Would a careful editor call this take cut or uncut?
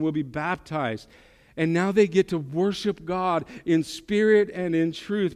uncut